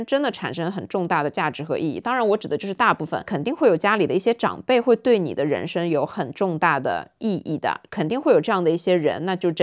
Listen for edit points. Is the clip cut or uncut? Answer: uncut